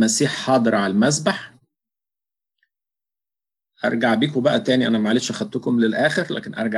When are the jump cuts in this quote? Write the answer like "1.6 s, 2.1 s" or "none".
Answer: none